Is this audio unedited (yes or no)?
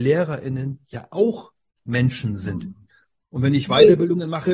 no